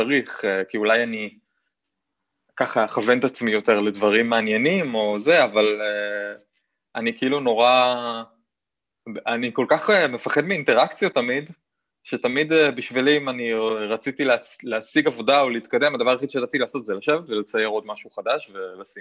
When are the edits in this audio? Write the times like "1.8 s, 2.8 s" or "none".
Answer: none